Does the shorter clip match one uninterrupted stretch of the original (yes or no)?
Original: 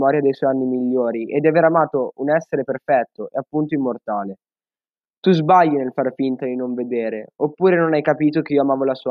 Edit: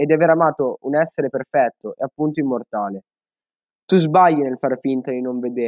yes